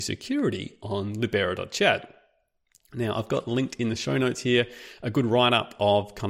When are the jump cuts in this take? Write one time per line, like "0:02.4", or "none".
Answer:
none